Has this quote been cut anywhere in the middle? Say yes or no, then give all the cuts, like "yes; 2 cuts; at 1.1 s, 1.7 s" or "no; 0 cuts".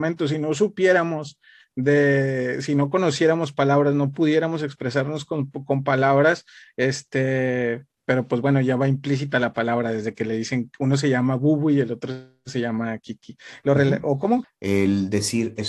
yes; 1 cut; at 14.4 s